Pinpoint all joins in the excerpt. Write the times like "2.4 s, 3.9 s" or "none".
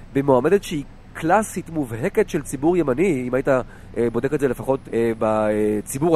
4.8 s